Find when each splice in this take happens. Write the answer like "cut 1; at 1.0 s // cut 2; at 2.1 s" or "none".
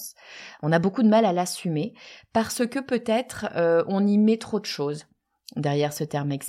none

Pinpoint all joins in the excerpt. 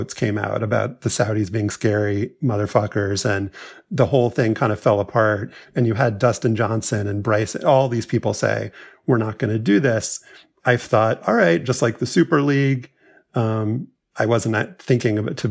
none

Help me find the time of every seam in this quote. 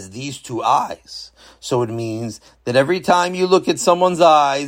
none

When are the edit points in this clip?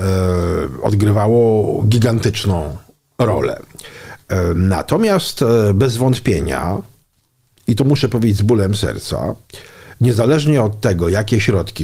none

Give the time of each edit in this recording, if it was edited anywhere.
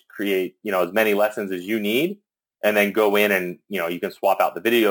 none

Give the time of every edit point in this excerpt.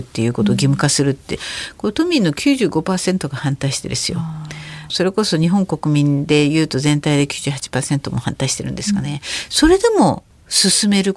none

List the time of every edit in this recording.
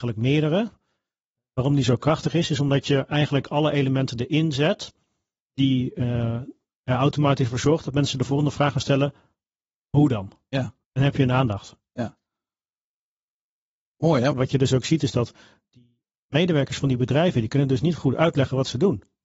cut 1; at 10.8 s // cut 2; at 14.3 s

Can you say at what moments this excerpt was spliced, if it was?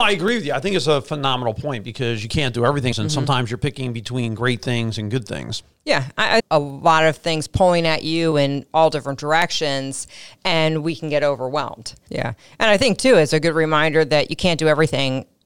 cut 1; at 2.9 s // cut 2; at 6.4 s // cut 3; at 12.1 s

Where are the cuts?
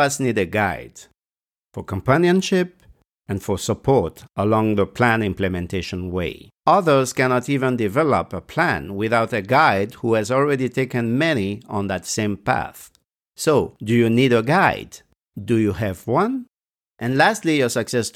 none

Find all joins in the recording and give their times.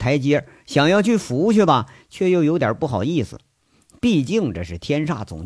none

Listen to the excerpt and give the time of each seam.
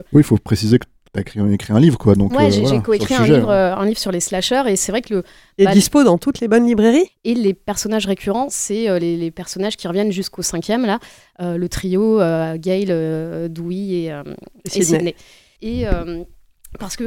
cut 1; at 7.1 s // cut 2; at 15.6 s

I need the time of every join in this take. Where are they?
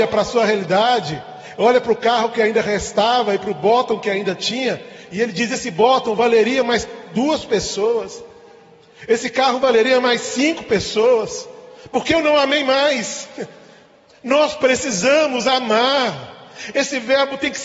cut 1; at 14.1 s

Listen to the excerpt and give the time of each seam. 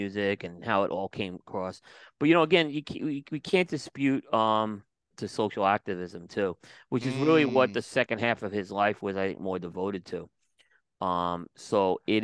cut 1; at 5.1 s

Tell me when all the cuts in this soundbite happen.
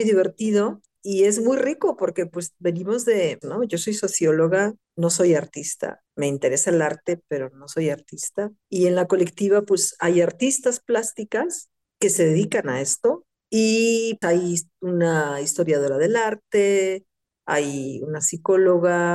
cut 1; at 3.4 s // cut 2; at 14.2 s

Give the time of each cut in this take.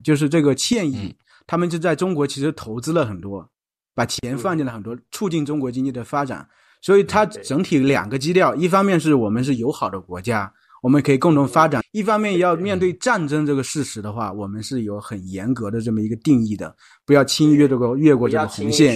cut 1; at 11.8 s

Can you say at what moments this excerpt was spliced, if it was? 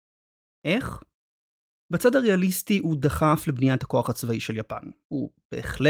none

